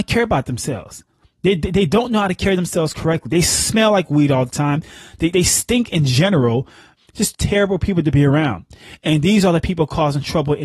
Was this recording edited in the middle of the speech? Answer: yes; 2 cuts; at 5.3 s, 7.0 s

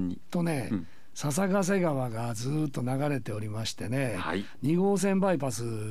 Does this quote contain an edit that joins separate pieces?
no; 0 cuts

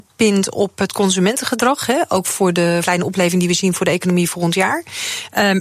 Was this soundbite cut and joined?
yes; 1 cut; at 2.8 s

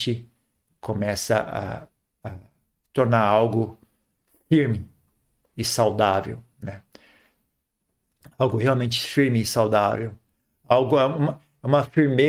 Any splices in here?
no; 0 cuts

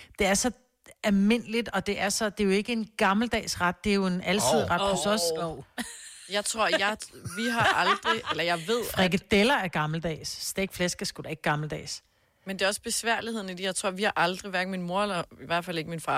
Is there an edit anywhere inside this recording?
no; 0 cuts

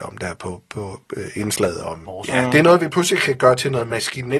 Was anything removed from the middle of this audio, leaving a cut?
no; 0 cuts

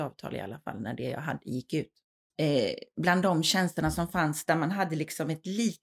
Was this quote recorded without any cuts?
no; 1 cut; at 2.3 s

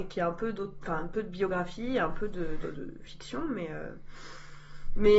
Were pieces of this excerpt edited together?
yes; 1 cut; at 2.6 s

